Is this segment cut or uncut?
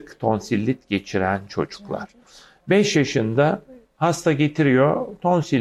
uncut